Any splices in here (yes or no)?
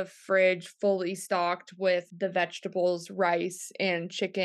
no